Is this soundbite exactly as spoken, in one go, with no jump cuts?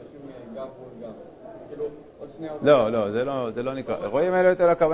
yes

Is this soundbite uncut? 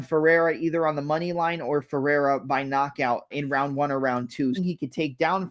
no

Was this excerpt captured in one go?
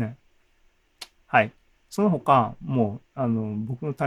yes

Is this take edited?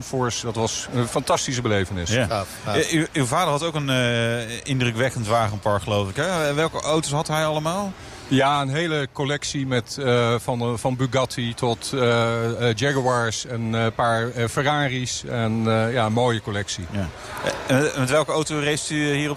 no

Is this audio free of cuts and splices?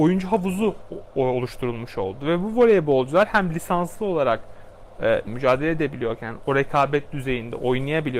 no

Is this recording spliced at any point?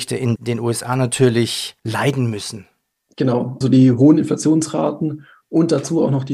yes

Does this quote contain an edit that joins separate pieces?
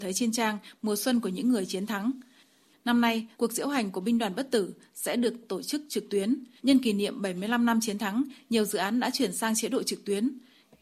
yes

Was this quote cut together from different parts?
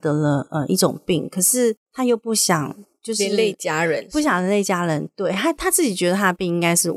no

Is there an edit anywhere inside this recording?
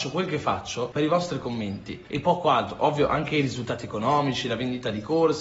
no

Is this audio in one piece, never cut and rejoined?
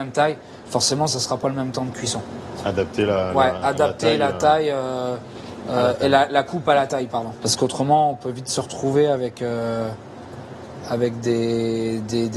no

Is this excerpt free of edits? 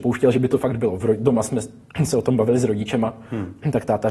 yes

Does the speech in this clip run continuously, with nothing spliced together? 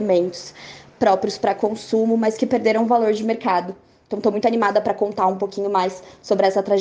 yes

